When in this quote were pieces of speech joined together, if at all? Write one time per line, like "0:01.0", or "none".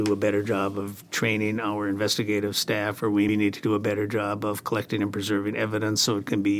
0:03.3